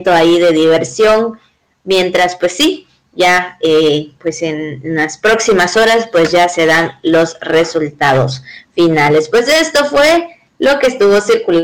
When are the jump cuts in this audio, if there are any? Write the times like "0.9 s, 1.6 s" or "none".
none

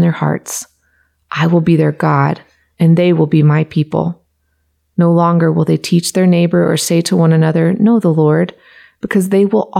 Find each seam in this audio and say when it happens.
none

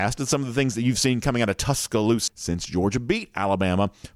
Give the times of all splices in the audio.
2.3 s

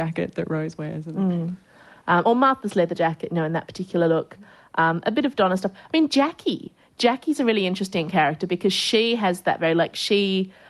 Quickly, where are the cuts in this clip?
none

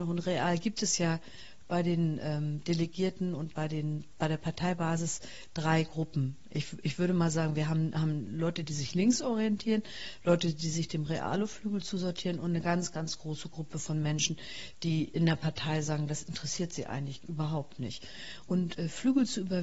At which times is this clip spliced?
18.5 s

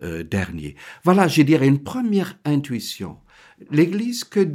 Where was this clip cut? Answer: none

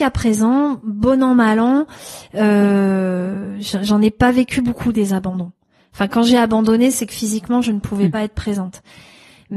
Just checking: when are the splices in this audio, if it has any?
none

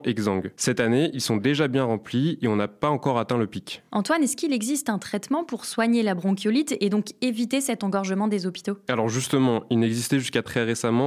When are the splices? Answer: none

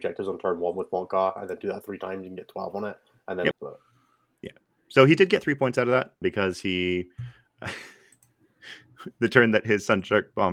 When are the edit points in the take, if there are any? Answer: 3.5 s, 6.2 s

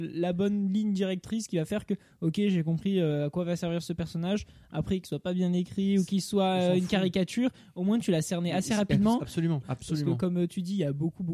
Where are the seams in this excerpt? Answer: 5.0 s, 9.6 s

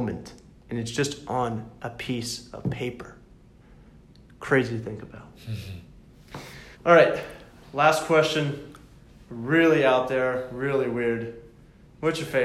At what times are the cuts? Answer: 6.7 s

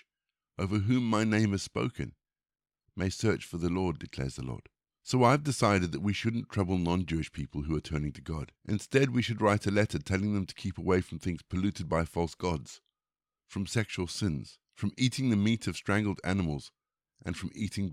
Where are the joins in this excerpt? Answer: 4.8 s, 8.6 s, 14.6 s

